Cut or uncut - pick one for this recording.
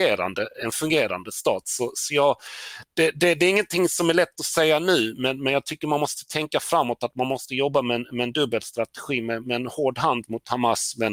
uncut